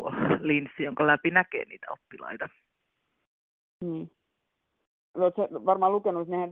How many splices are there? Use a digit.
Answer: 1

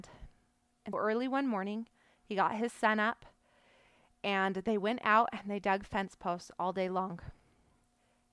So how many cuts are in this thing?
1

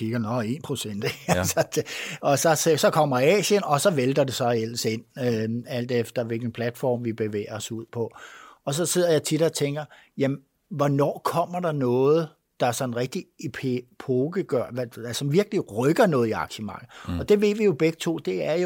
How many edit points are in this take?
0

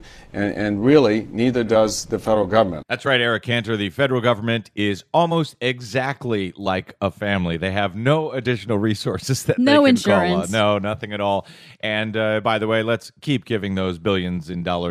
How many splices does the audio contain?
0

